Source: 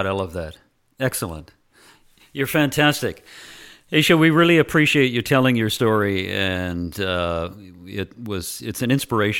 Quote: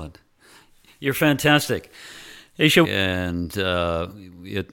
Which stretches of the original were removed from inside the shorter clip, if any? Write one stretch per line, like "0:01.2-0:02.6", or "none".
0:04.2-0:06.3